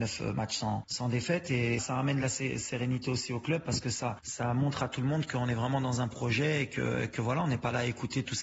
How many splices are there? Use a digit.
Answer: 1